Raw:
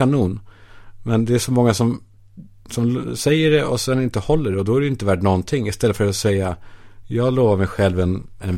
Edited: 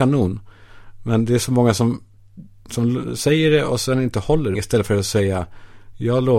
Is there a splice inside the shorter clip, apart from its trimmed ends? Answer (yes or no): yes